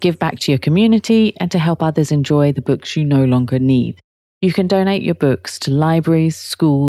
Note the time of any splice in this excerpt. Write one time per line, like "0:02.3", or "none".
none